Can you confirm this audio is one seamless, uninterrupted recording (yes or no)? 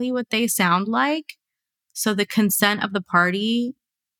yes